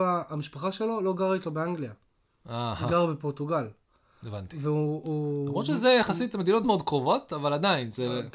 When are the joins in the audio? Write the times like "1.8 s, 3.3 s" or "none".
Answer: 6.6 s